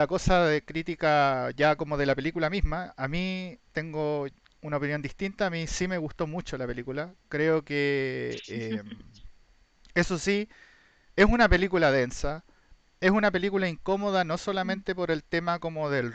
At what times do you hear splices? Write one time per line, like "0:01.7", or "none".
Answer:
none